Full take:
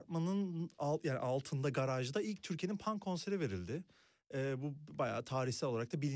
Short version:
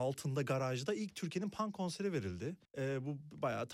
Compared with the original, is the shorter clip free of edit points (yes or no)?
no